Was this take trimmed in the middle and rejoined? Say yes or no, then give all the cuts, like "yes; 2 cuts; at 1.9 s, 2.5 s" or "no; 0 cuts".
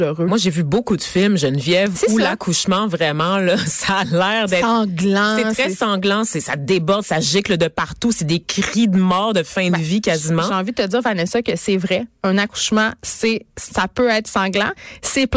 no; 0 cuts